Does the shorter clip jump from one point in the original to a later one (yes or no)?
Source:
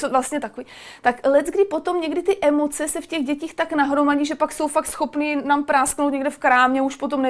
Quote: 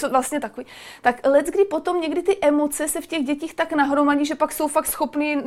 no